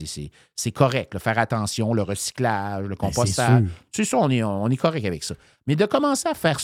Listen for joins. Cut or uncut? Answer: uncut